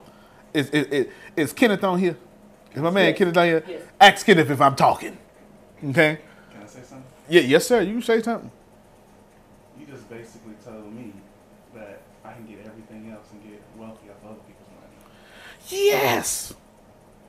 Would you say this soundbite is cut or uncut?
uncut